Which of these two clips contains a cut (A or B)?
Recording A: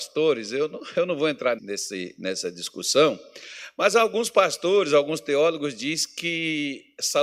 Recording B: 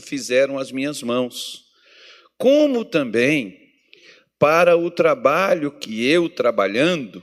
A